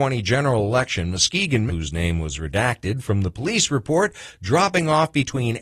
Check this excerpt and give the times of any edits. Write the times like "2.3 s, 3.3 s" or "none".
1.7 s

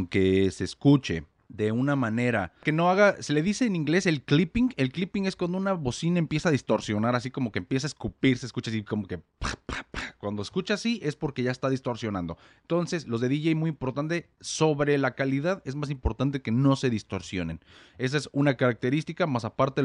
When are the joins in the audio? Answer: none

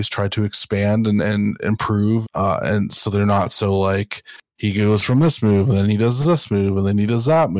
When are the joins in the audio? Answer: 2.2 s

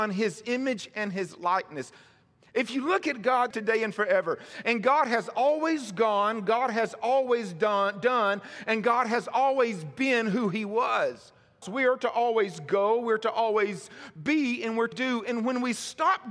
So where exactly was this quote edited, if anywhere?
3.5 s, 11.6 s, 14.9 s

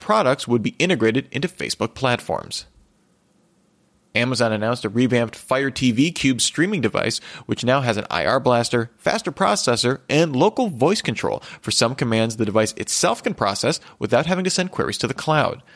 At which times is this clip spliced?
none

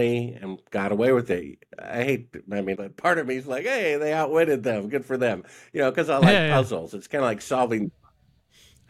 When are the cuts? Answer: 2.7 s

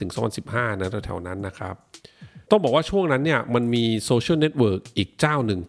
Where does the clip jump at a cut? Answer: 2.4 s

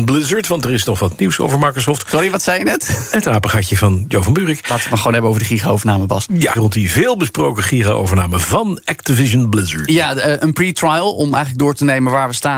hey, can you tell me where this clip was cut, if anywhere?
6.6 s

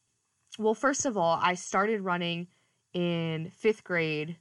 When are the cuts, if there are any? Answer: none

